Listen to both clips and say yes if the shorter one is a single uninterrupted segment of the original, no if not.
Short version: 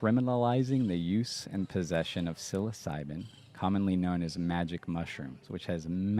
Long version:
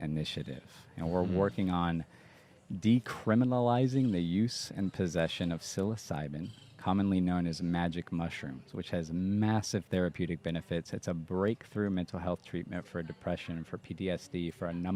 yes